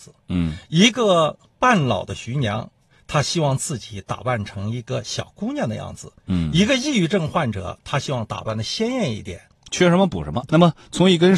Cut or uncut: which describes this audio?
cut